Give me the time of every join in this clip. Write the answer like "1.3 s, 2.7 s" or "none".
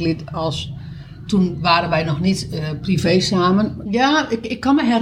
3.9 s